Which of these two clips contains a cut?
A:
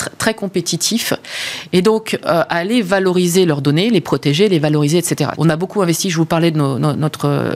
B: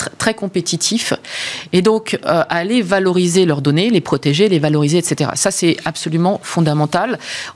A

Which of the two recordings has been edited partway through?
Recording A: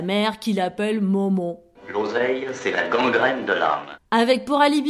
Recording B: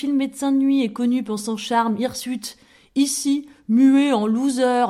A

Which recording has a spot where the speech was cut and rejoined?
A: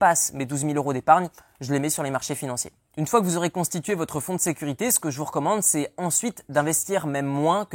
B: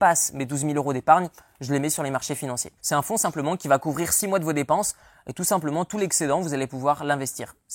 B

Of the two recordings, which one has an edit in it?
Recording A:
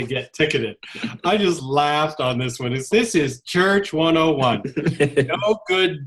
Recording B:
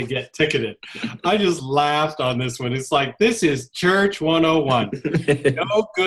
A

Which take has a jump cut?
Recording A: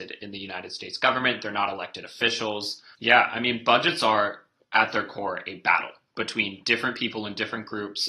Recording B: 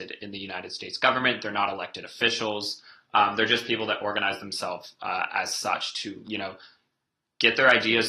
A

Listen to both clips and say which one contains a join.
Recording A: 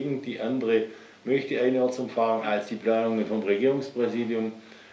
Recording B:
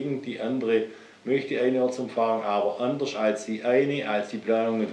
A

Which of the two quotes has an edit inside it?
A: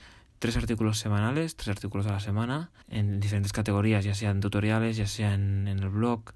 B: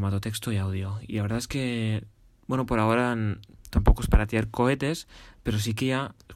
A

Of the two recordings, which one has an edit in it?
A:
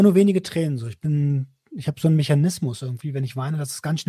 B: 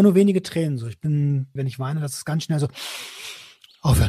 B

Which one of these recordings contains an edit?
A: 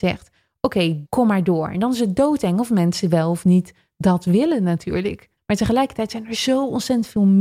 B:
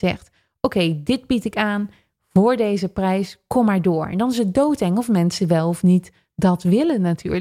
A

